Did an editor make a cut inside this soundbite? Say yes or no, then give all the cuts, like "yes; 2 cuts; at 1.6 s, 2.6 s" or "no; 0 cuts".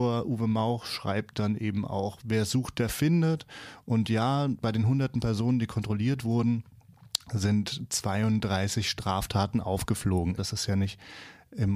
yes; 1 cut; at 10.4 s